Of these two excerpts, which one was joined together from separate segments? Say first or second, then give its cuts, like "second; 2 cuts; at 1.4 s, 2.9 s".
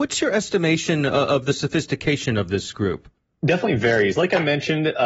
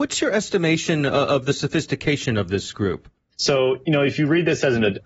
second; 1 cut; at 3.3 s